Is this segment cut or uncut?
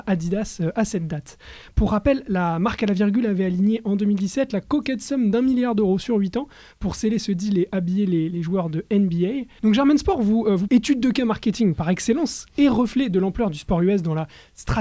cut